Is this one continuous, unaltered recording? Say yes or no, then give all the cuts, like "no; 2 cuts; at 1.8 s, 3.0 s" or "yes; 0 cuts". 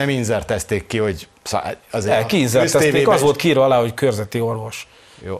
yes; 0 cuts